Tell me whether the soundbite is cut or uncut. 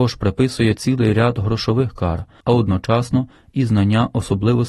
cut